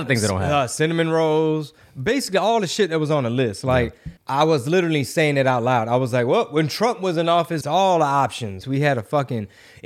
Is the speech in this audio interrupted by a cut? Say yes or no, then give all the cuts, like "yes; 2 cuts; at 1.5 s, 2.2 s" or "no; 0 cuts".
yes; 3 cuts; at 4.2 s, 7.6 s, 8.6 s